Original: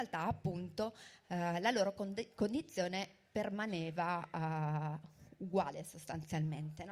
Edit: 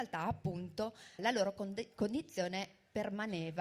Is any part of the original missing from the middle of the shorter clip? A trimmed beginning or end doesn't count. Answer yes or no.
yes